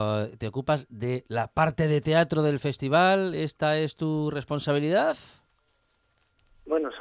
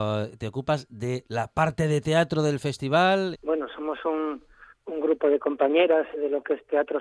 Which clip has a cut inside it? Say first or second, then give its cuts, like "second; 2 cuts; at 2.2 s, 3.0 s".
second; 2 cuts; at 3.3 s, 6.1 s